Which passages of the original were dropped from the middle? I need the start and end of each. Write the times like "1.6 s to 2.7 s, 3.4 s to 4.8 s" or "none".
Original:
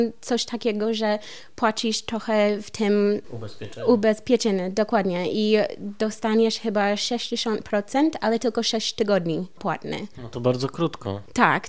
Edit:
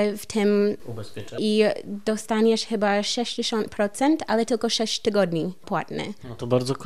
3.8 s to 5.3 s